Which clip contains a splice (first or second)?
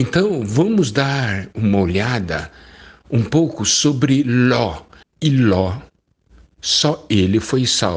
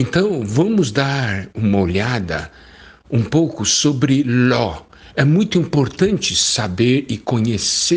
first